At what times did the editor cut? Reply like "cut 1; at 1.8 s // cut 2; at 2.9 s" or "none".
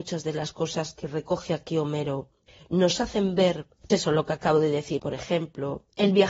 cut 1; at 3.9 s // cut 2; at 5.0 s